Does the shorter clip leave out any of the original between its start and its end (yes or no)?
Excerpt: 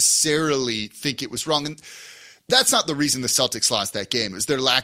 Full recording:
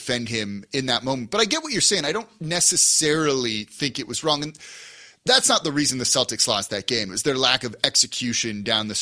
no